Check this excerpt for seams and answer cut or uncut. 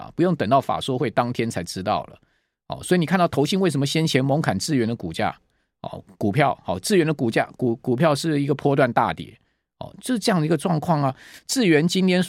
uncut